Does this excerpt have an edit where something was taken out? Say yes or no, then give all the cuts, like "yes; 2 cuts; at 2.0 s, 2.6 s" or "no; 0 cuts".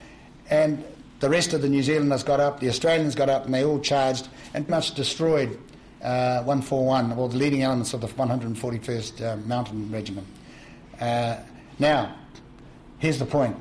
yes; 1 cut; at 4.7 s